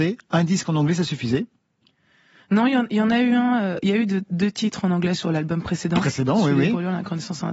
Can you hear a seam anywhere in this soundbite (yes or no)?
no